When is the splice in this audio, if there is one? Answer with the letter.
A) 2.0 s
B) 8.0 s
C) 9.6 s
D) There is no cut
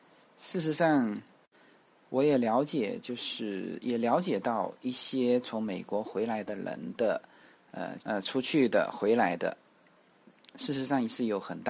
B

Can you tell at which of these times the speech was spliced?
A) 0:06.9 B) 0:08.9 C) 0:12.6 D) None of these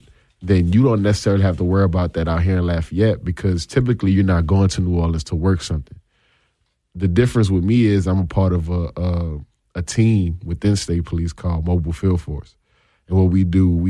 D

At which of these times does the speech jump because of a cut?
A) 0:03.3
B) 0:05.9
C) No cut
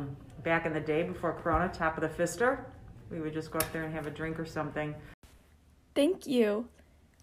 C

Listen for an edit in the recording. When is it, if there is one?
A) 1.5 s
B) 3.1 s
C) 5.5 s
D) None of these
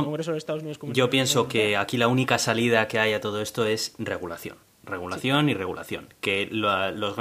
D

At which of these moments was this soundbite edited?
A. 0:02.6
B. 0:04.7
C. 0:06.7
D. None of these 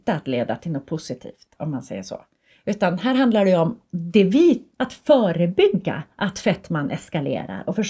B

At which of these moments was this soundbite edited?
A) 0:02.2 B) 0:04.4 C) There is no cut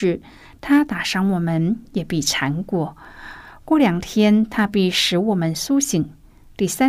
C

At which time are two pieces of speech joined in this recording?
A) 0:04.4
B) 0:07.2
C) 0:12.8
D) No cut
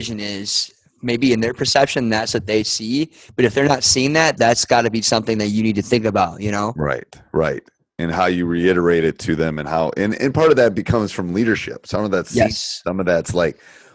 A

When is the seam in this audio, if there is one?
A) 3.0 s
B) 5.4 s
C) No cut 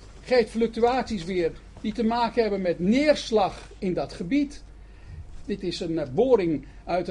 B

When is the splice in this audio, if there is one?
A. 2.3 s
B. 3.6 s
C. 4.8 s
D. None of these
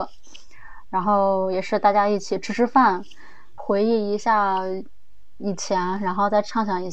B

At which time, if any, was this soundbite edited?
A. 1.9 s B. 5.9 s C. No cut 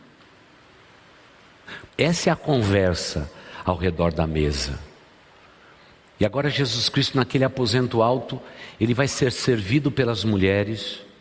A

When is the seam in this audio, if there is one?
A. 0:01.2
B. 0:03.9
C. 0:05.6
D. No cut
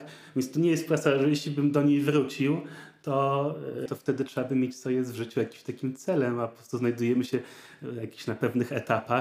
B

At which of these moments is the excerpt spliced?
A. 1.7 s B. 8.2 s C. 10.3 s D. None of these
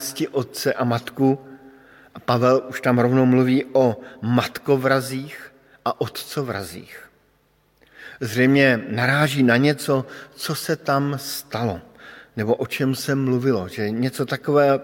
D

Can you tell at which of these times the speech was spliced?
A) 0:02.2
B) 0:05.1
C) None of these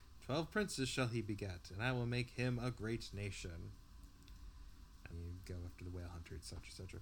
B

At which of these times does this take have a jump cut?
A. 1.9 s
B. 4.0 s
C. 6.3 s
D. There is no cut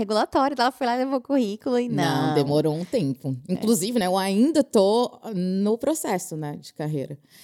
D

